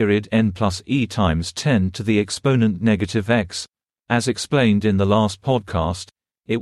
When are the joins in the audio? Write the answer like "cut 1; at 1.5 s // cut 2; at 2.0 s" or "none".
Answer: cut 1; at 4.0 s